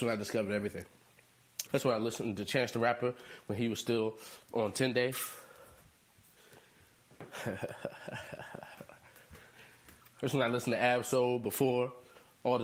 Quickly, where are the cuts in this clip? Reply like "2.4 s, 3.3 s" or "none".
1.7 s